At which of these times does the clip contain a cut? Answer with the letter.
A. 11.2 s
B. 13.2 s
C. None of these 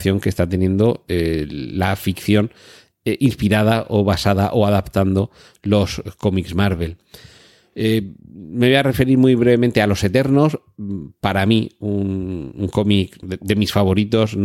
B